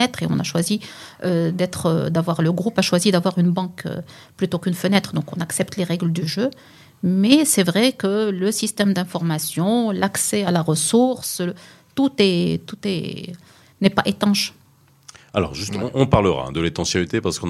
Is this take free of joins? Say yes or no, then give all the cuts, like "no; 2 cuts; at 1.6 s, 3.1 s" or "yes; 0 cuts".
yes; 0 cuts